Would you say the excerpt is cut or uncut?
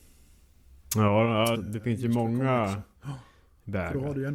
cut